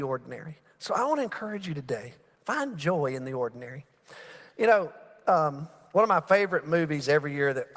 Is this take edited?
no; 0 cuts

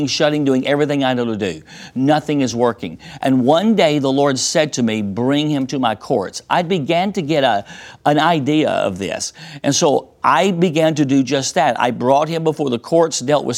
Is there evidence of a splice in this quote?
no; 0 cuts

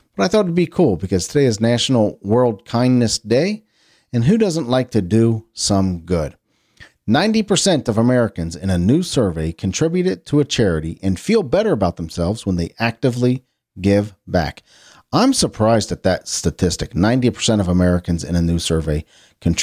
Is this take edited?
no; 0 cuts

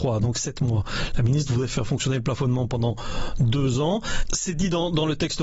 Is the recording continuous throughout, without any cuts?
yes; 0 cuts

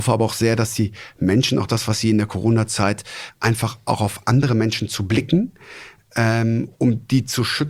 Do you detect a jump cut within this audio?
yes; 1 cut; at 3.3 s

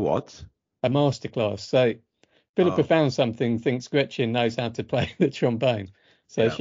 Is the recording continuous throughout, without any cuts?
yes; 0 cuts

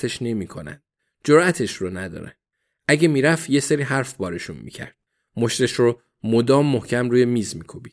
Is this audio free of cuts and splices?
yes; 0 cuts

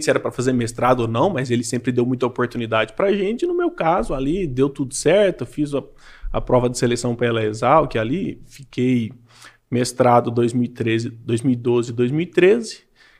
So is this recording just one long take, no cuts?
yes; 0 cuts

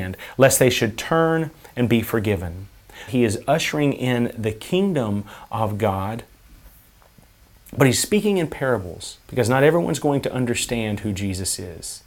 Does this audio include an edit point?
yes; 2 cuts; at 3.1 s, 9.2 s

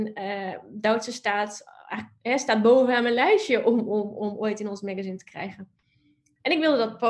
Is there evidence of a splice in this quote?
no; 0 cuts

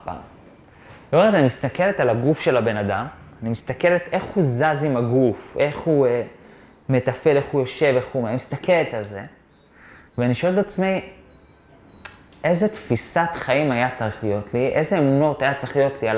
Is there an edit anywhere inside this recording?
no; 0 cuts

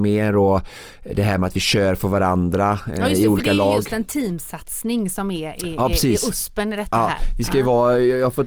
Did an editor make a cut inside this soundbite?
no; 0 cuts

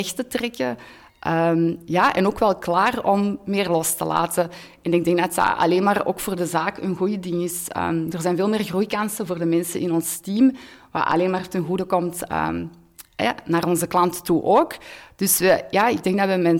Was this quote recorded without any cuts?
yes; 0 cuts

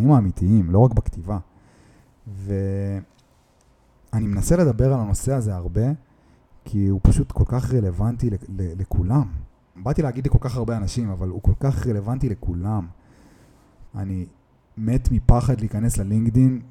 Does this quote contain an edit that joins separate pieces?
yes; 2 cuts; at 9.8 s, 13.9 s

